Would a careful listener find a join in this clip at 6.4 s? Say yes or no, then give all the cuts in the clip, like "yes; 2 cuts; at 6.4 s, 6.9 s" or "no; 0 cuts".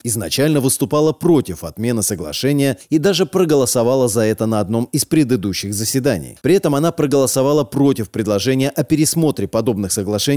yes; 1 cut; at 6.4 s